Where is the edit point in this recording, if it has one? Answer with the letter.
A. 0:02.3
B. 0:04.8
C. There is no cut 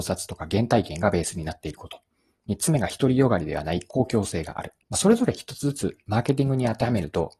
B